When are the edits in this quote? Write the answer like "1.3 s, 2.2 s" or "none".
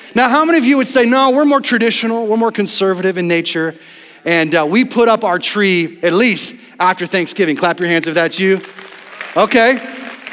none